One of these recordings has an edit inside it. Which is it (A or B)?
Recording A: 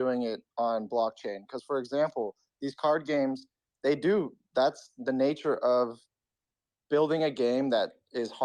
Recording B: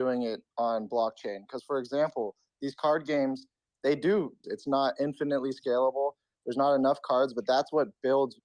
B